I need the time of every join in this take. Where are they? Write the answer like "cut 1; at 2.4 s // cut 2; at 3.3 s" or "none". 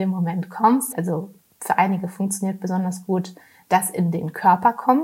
cut 1; at 0.9 s